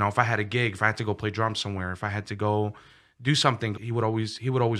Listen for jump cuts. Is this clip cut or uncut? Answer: cut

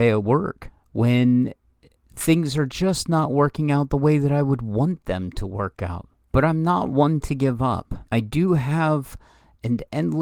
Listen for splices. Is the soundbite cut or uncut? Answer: cut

